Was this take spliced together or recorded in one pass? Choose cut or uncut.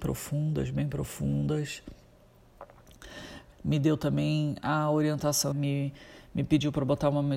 cut